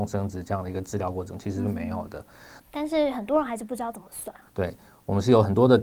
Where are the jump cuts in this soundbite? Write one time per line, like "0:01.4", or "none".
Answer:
0:02.6
0:04.5